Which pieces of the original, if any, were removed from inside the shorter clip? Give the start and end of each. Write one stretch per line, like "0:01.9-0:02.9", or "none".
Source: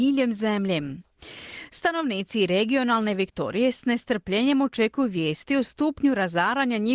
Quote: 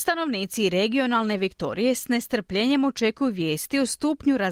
none

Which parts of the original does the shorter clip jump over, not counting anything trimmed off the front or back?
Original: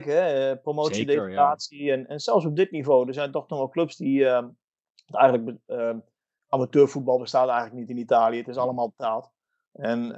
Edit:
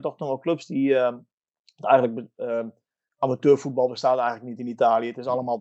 none

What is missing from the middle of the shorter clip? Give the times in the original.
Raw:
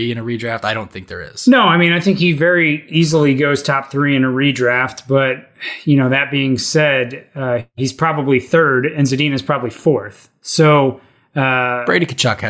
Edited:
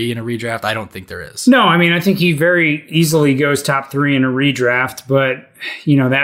none

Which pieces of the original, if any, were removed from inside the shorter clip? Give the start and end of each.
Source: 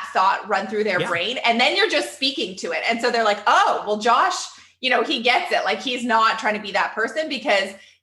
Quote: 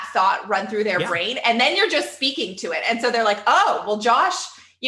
none

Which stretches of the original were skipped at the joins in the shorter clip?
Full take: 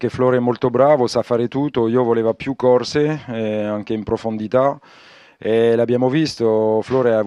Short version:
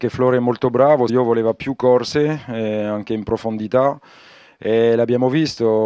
0:01.1-0:01.9

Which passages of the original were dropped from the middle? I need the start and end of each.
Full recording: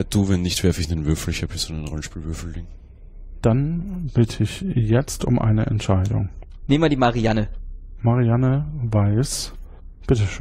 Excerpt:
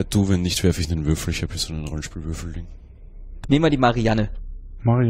0:03.4-0:06.6

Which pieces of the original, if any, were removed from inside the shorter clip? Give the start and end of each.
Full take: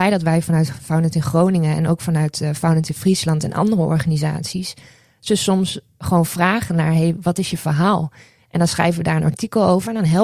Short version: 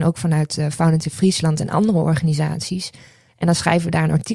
0:05.1-0:08.4

